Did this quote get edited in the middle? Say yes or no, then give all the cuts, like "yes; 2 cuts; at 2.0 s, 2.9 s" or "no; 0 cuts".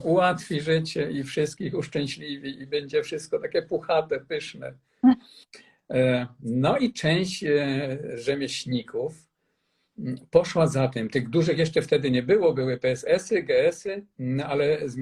yes; 1 cut; at 14.1 s